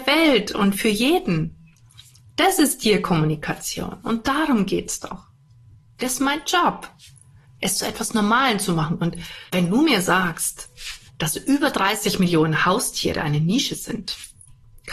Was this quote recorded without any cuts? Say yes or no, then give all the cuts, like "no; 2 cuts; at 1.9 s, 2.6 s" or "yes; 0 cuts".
no; 2 cuts; at 9.5 s, 11.1 s